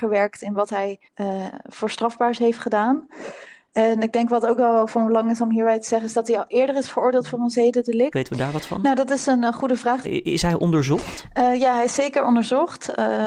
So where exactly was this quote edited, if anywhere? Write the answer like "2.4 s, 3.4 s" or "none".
1.0 s, 8.1 s, 10.0 s